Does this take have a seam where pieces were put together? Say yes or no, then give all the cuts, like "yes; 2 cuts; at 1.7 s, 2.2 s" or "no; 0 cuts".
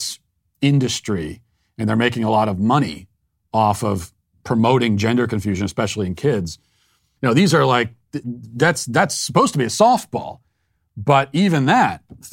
yes; 1 cut; at 7.2 s